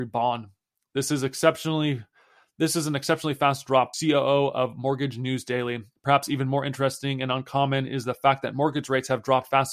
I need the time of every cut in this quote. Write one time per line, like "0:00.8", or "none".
0:03.9